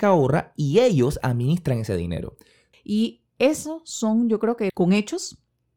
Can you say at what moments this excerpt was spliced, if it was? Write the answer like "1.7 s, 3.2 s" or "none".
2.7 s, 4.7 s